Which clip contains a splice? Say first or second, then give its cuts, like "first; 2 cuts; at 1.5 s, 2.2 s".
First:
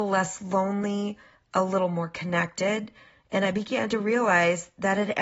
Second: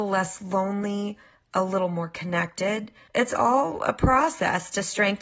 second; 1 cut; at 3.1 s